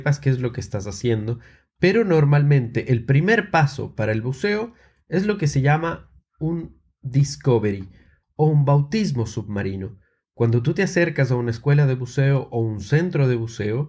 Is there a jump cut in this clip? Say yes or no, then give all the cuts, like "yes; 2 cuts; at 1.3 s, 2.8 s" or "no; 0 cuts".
no; 0 cuts